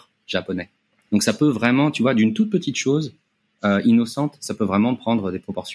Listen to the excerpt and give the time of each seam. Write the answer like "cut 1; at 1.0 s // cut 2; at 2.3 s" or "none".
cut 1; at 1.1 s